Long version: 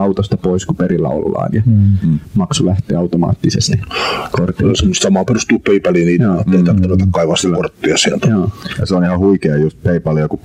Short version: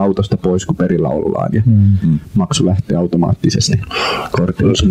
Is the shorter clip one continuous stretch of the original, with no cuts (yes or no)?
yes